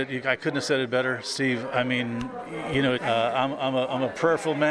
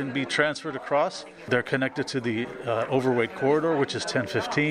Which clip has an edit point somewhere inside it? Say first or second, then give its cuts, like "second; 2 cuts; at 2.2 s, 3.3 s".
first; 2 cuts; at 1.7 s, 2.9 s